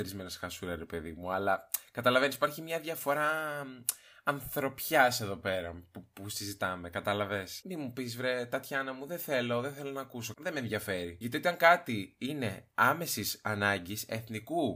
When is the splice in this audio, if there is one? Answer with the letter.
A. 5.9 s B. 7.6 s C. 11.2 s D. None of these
B